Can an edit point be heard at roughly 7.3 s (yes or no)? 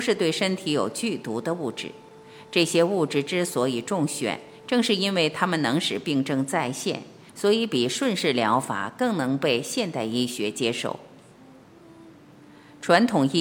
yes